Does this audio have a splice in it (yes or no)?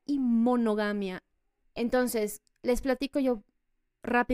yes